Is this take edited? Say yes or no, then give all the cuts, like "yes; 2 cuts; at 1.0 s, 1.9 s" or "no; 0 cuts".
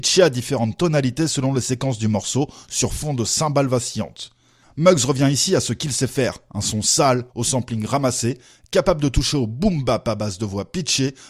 yes; 2 cuts; at 4.6 s, 7.3 s